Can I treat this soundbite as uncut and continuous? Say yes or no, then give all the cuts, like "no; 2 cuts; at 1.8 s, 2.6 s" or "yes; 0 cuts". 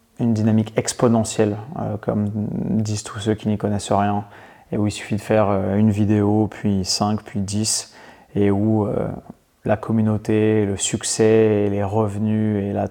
yes; 0 cuts